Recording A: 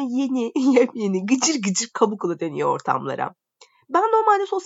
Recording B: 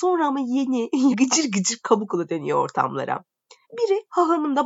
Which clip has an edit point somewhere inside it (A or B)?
B